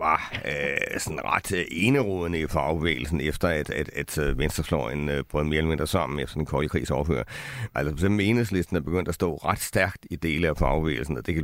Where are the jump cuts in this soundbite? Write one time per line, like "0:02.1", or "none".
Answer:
0:07.7